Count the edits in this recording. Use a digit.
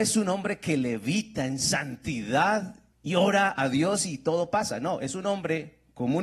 1